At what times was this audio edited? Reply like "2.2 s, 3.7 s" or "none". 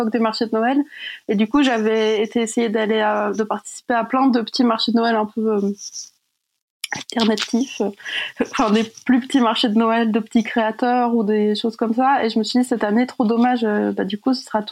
none